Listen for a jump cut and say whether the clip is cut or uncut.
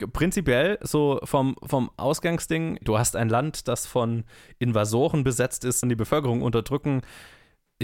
cut